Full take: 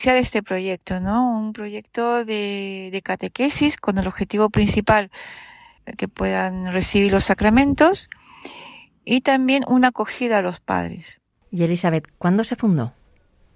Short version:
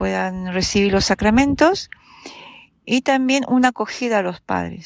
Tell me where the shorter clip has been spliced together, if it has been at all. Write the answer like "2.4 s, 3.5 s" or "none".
none

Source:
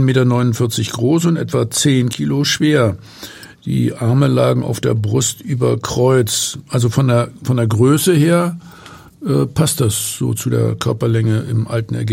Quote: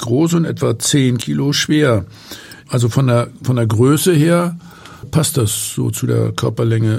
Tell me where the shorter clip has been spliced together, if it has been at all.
2.6 s, 5.0 s

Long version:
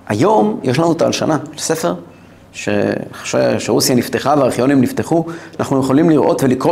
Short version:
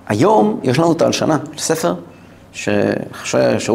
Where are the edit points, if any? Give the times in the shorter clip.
none

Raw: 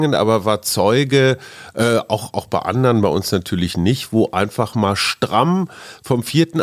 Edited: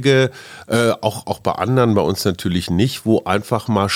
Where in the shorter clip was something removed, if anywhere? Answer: none

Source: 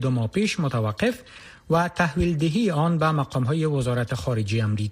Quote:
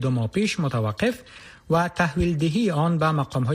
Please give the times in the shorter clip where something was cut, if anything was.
none

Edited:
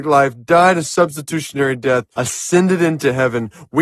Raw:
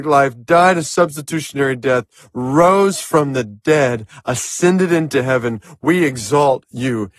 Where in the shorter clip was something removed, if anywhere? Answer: 2.1 s

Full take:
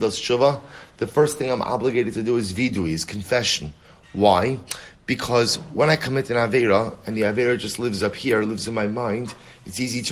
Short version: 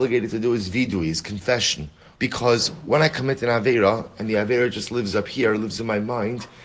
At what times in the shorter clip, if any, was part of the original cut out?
2.2 s

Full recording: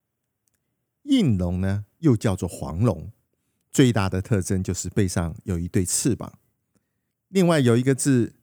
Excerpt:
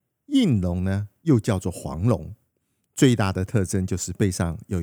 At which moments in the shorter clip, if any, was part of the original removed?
none

